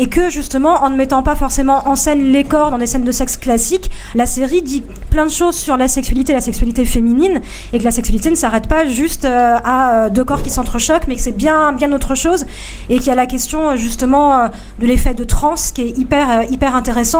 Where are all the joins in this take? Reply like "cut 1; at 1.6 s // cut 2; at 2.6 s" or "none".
none